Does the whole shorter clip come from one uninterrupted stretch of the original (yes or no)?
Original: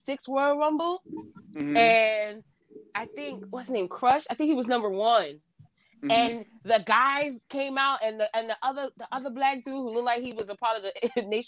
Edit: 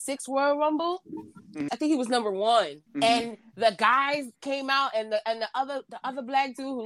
no